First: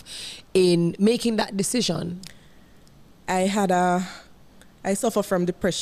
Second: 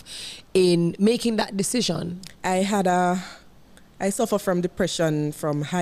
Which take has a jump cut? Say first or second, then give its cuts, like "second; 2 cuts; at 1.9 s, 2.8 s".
second; 1 cut; at 2.3 s